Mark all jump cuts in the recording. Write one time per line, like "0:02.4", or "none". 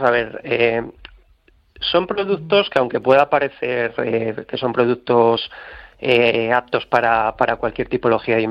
none